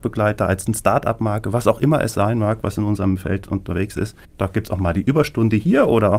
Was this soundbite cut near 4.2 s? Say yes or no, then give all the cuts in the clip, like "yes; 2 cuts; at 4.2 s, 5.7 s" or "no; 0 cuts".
yes; 1 cut; at 4.2 s